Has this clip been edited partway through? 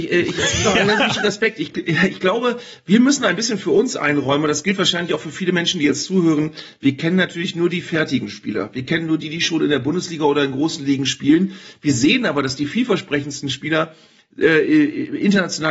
no; 0 cuts

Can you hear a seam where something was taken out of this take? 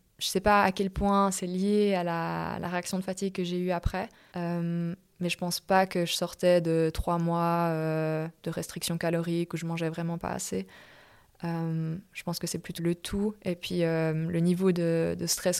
yes; 2 cuts; at 4.3 s, 12.8 s

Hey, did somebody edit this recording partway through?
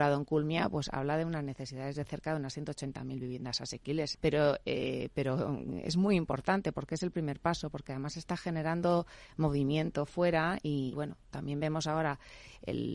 yes; 2 cuts; at 4.1 s, 10.9 s

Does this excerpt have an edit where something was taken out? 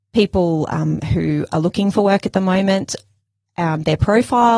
no; 0 cuts

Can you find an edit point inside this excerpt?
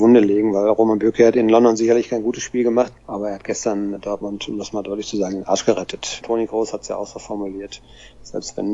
yes; 2 cuts; at 3.0 s, 6.2 s

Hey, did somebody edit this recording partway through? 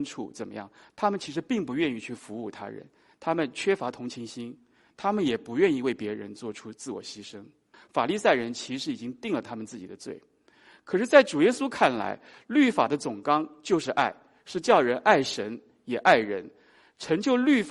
yes; 1 cut; at 7.7 s

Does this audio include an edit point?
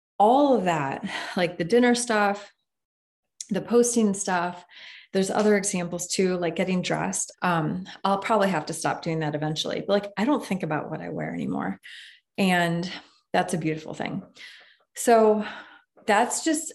yes; 1 cut; at 7.3 s

